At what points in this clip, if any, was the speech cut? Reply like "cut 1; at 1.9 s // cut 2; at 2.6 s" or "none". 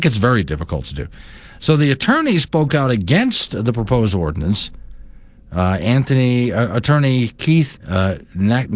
cut 1; at 7.8 s